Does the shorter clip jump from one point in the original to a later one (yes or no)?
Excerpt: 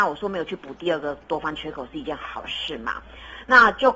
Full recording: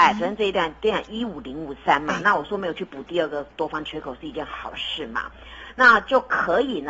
no